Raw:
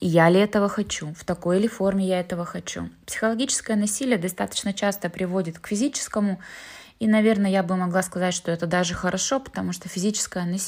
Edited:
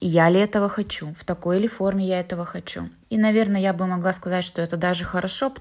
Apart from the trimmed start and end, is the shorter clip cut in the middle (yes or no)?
yes